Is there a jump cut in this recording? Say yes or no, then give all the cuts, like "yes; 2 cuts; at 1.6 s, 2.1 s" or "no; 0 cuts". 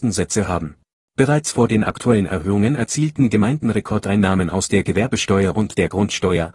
yes; 1 cut; at 1.0 s